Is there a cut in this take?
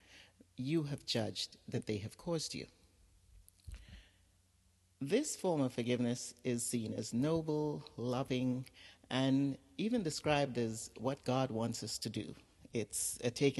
no; 0 cuts

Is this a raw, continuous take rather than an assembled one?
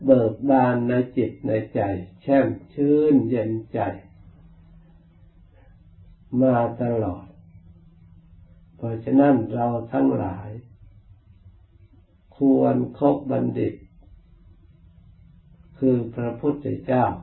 yes; 0 cuts

